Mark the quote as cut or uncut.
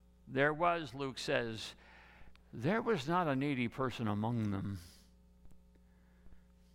uncut